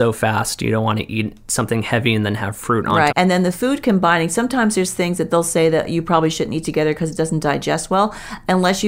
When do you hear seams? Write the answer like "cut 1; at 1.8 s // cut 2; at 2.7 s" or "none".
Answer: cut 1; at 3.1 s